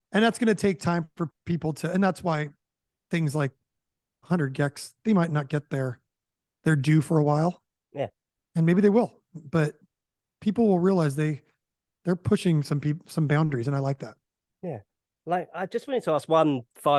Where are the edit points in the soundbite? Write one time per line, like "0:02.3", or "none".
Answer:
none